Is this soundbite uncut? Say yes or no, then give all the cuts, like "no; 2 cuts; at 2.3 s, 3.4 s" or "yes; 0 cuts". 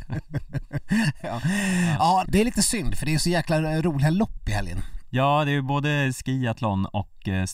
no; 1 cut; at 2.2 s